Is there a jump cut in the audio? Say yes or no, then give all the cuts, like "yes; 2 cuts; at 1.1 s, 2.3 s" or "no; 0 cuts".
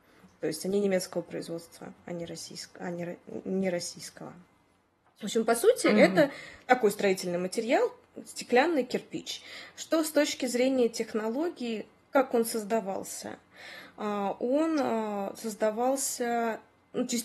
no; 0 cuts